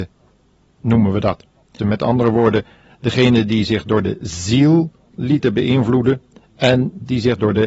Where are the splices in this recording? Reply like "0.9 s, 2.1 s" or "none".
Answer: 1.8 s